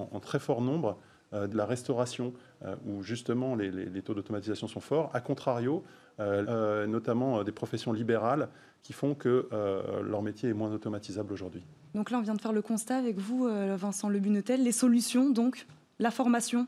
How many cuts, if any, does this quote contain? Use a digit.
2